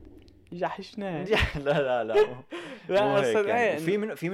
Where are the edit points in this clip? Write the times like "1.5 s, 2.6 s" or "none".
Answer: none